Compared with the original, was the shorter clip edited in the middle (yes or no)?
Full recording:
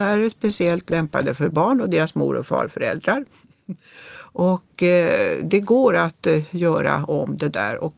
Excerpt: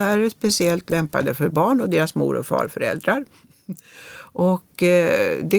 no